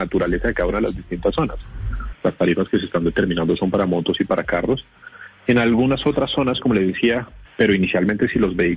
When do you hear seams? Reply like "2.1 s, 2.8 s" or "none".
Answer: 2.1 s, 7.4 s